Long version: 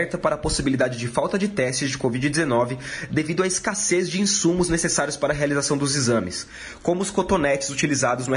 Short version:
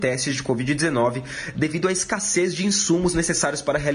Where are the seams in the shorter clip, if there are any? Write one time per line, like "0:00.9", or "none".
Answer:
none